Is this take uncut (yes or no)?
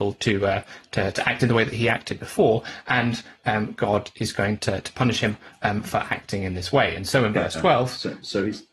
no